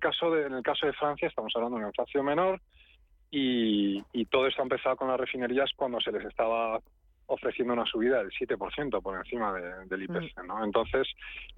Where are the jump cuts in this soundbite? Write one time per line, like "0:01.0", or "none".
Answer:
none